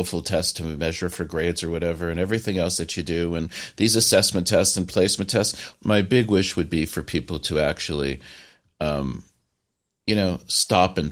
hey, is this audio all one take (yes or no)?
no